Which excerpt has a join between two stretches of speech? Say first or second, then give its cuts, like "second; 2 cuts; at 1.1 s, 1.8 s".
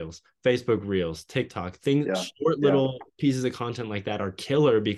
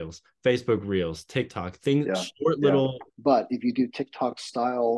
second; 1 cut; at 3.1 s